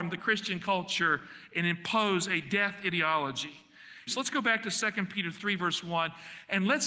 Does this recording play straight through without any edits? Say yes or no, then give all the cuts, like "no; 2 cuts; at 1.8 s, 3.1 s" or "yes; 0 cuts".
no; 1 cut; at 4.1 s